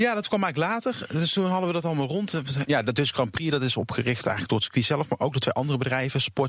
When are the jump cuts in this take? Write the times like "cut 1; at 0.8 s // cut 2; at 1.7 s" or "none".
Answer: cut 1; at 2.6 s